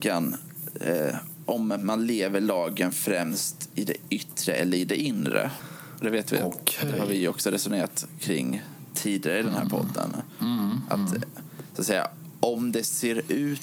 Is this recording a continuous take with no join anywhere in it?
yes; 0 cuts

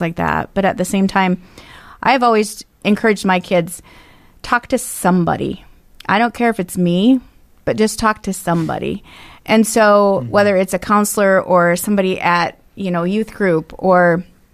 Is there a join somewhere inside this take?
no; 0 cuts

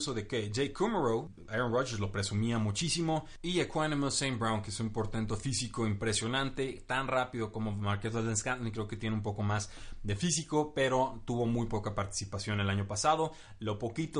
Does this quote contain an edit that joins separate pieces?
no; 0 cuts

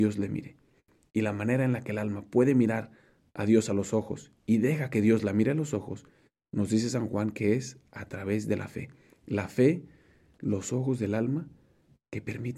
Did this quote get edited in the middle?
yes; 1 cut; at 1.1 s

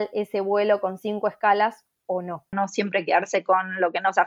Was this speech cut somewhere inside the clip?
yes; 1 cut; at 2.5 s

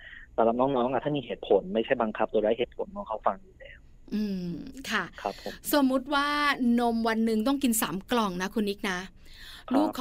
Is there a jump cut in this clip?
no; 0 cuts

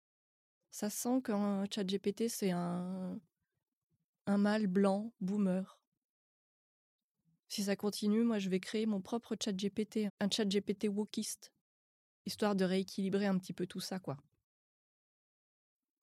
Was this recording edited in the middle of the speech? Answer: yes; 1 cut; at 10.1 s

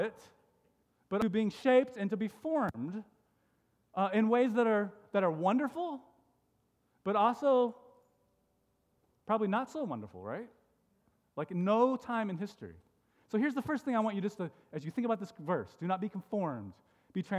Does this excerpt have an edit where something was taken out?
no; 0 cuts

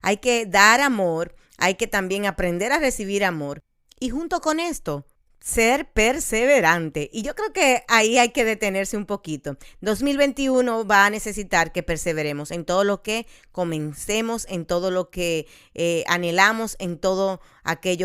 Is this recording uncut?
yes; 0 cuts

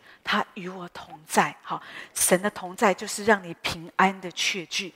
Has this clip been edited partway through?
yes; 1 cut; at 2.1 s

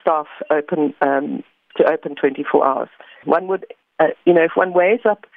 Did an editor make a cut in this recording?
yes; 1 cut; at 3.2 s

